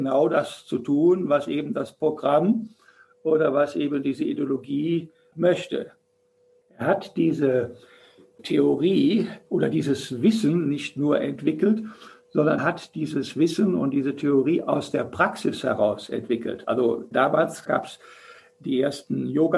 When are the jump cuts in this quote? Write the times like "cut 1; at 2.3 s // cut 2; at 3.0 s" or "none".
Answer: cut 1; at 6.6 s // cut 2; at 12.6 s